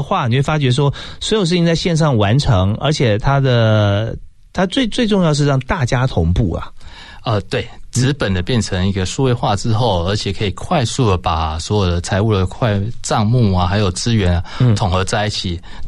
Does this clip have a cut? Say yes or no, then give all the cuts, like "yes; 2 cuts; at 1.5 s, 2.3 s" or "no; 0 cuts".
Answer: no; 0 cuts